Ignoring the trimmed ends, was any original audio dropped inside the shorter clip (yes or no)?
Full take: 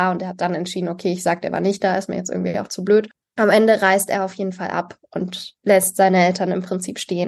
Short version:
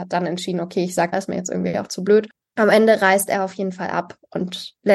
yes